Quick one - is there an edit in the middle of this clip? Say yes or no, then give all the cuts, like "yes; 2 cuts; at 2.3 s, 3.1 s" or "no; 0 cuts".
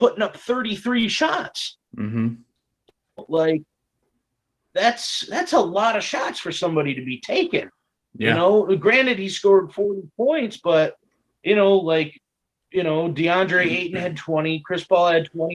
no; 0 cuts